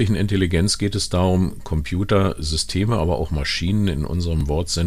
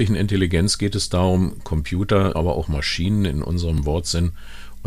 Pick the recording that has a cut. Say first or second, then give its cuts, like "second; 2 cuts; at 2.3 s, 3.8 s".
second; 1 cut; at 2.3 s